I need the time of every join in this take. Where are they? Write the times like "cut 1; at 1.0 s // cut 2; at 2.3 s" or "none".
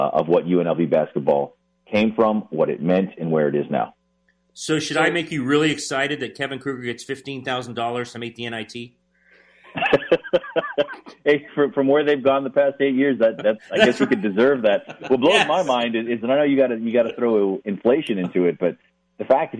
cut 1; at 16.2 s